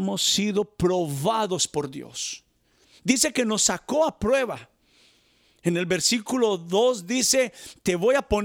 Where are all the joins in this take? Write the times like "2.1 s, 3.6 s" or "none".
none

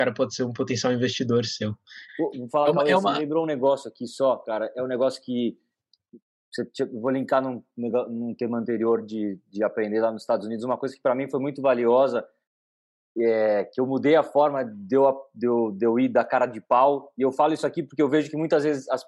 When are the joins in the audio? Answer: 2.1 s

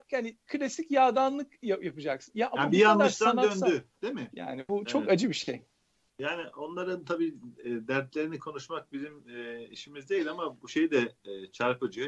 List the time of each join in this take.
4.3 s

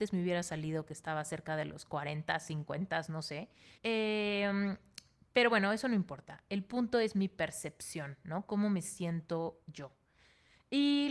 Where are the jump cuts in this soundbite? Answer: 3.8 s

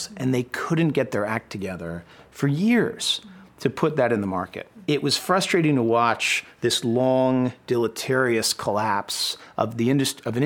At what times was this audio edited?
none

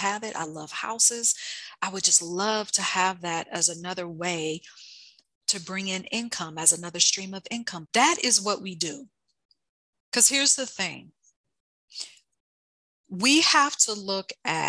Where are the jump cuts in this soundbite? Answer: 7.8 s, 9.9 s

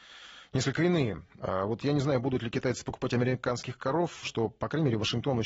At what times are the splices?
1.4 s, 4.2 s

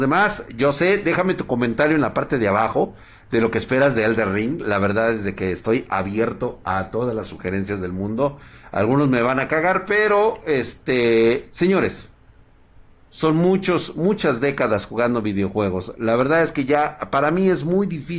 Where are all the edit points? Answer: none

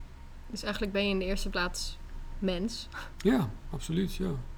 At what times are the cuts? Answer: 1.5 s

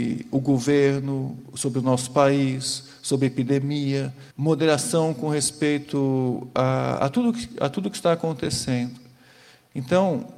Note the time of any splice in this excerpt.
4.3 s

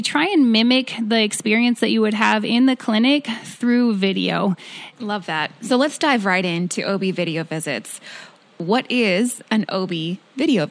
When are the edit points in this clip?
4.9 s

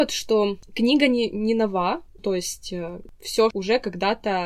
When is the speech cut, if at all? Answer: 2.2 s, 3.5 s

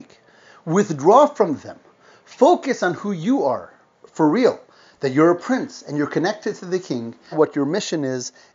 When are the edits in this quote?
7.3 s

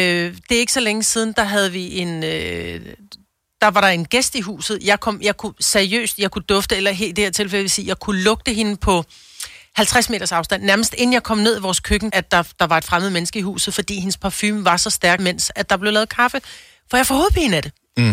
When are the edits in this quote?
12.1 s, 15.2 s

